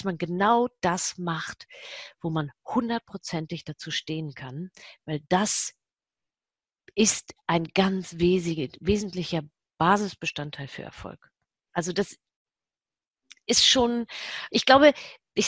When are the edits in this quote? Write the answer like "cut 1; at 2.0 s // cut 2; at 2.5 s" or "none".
cut 1; at 11.7 s // cut 2; at 14.5 s